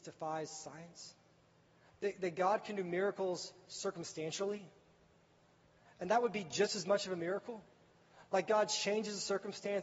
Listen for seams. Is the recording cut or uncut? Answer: uncut